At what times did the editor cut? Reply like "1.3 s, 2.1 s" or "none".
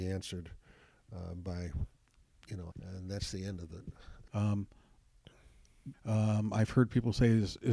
2.7 s, 4.3 s, 5.9 s